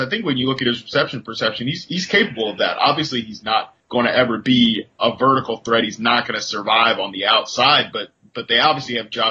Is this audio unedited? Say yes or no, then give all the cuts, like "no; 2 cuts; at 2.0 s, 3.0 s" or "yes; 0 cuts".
yes; 0 cuts